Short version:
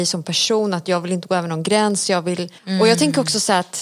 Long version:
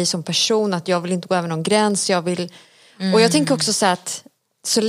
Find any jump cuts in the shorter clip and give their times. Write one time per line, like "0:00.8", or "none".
0:02.6

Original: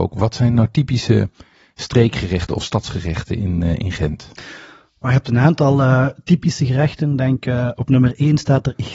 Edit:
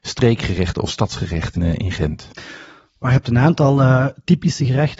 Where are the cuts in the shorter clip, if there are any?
0:01.6

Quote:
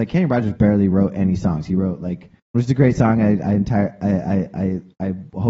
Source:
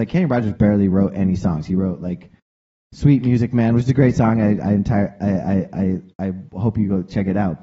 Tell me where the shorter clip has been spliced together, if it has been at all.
0:02.5

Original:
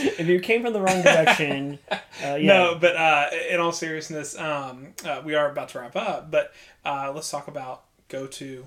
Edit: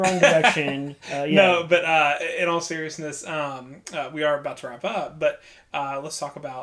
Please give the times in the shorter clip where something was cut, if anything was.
0:01.0

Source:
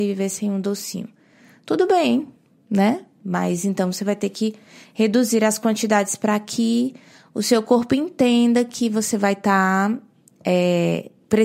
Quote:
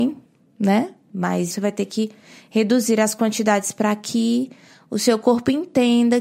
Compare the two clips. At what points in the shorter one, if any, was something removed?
0:01.5

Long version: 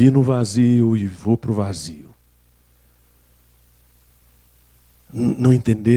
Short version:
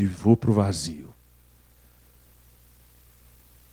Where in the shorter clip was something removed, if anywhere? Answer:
none

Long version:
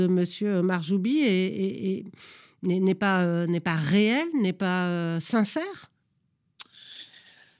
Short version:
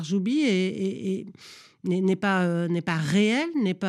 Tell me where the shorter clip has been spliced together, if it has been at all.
none

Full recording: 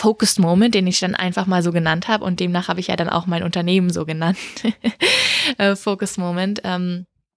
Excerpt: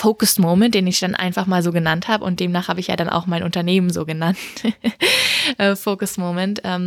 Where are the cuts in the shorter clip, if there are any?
none

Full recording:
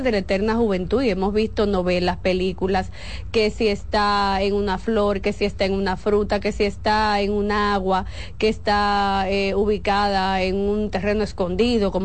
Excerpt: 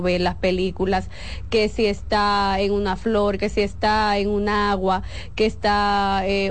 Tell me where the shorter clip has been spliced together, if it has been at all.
0:03.4

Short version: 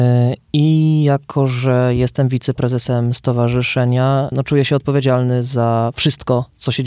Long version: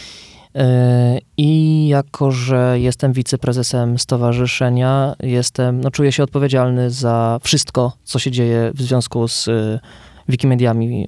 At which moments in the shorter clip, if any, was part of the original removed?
0:04.3

